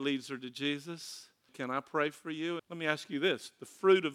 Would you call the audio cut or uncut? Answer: cut